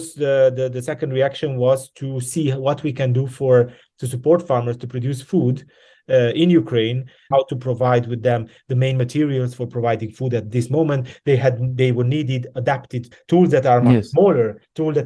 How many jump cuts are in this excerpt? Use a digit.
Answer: 2